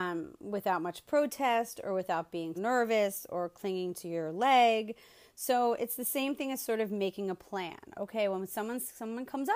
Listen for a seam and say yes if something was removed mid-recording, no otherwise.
yes